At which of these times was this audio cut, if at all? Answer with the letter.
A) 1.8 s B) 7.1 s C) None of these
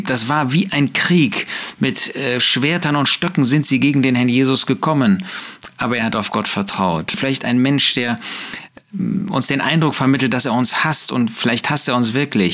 B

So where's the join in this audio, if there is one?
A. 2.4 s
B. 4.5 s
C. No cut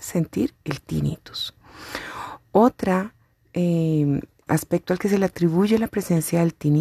B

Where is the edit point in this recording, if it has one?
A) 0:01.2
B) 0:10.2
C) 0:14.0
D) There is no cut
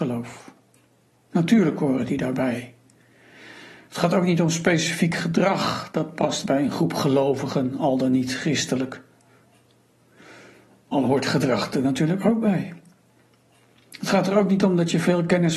A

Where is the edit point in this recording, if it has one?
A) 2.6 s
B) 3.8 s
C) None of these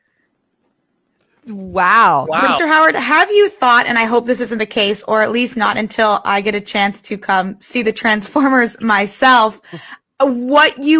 A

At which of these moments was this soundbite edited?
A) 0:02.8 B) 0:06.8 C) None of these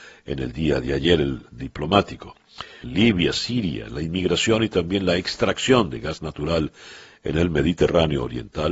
A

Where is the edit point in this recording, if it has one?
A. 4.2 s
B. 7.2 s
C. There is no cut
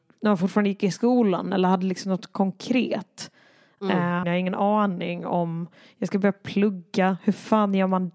A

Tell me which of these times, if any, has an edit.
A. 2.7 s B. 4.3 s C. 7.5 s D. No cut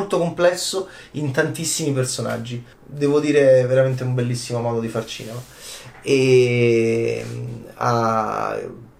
A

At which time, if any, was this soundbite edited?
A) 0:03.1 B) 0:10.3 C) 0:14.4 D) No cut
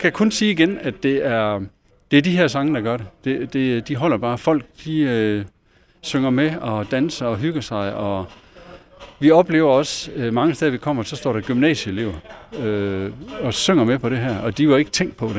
D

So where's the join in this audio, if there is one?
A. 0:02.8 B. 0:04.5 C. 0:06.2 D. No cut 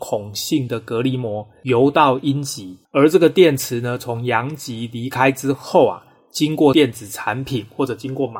A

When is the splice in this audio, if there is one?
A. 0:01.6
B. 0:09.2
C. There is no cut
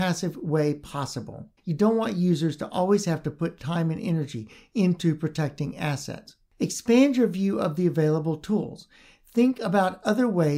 A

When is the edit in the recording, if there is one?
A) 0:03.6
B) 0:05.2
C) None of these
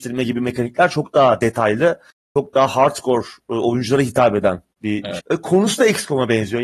B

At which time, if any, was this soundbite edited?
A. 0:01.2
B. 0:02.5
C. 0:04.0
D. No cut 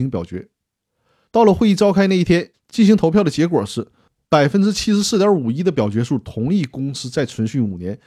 B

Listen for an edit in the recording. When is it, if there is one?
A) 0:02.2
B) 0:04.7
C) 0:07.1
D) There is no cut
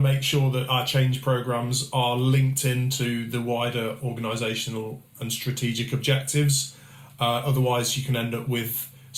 D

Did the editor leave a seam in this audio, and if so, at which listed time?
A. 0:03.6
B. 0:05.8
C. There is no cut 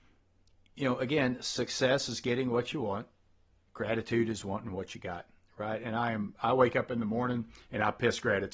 C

